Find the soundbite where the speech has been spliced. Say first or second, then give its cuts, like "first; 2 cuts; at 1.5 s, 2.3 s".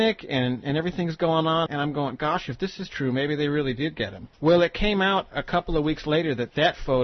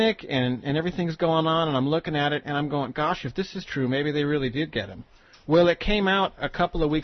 first; 2 cuts; at 1.7 s, 4.3 s